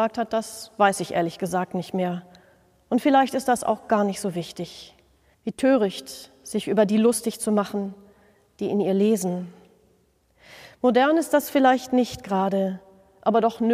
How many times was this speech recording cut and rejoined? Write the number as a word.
one